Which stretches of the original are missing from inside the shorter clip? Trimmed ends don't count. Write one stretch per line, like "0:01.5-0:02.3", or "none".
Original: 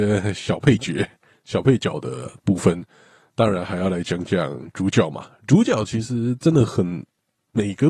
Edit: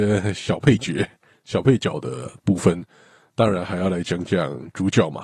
none